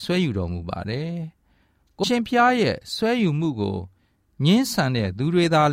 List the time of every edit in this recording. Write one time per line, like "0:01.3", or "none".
0:02.0